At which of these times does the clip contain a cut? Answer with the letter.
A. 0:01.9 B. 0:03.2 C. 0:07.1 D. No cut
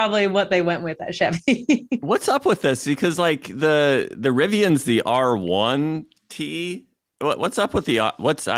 D